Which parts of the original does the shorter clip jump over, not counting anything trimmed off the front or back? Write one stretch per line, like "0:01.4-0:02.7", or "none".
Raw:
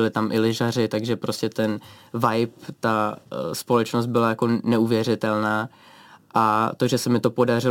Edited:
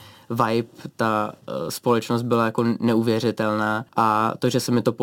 0:05.7-0:06.3